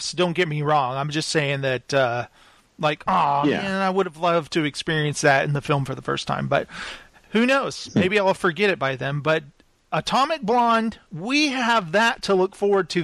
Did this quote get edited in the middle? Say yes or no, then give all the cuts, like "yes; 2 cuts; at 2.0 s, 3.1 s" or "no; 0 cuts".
no; 0 cuts